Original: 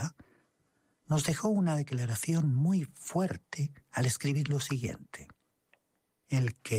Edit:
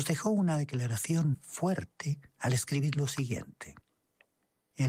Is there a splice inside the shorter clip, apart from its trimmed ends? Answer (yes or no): yes